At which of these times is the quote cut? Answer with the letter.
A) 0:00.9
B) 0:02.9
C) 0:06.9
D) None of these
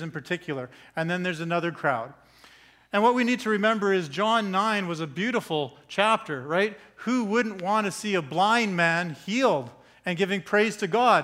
D